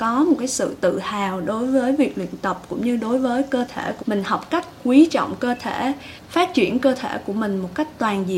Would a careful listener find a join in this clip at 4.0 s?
yes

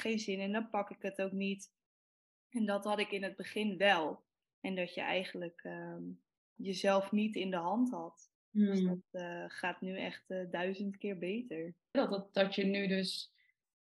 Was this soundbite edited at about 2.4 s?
no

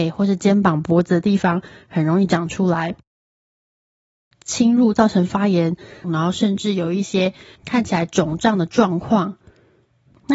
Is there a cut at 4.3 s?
yes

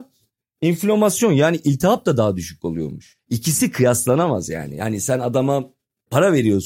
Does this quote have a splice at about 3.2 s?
yes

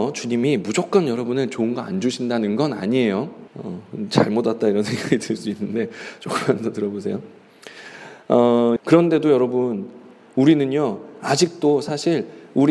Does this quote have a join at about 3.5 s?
yes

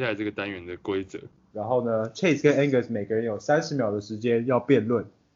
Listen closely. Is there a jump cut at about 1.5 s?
yes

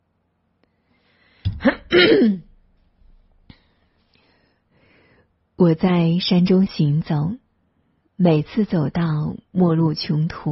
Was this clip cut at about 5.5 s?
no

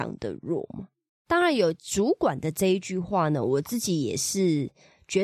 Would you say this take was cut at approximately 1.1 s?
no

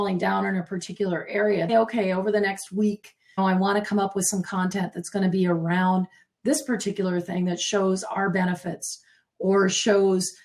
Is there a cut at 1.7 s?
yes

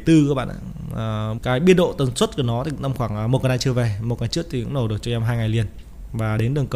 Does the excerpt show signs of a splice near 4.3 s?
no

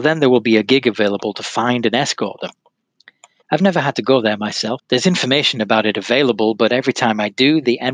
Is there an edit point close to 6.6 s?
no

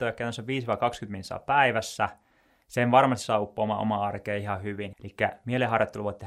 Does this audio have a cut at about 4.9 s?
yes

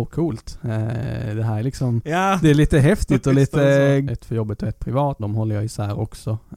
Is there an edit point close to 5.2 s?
yes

